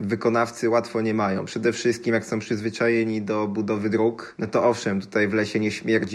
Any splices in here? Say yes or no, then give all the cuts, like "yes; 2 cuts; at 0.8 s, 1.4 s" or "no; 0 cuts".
no; 0 cuts